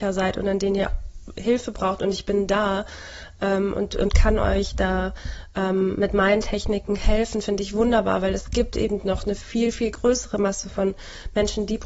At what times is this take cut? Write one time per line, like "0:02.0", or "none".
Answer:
none